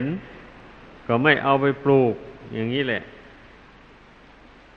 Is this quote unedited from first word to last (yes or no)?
yes